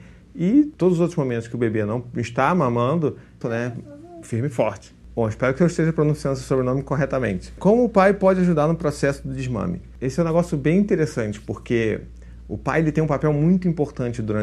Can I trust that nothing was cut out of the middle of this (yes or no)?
no